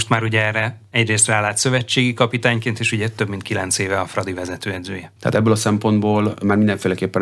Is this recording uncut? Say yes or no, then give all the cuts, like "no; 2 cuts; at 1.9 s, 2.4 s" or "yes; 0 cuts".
no; 1 cut; at 5.2 s